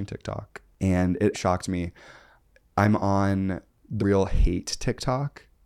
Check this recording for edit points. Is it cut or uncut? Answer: cut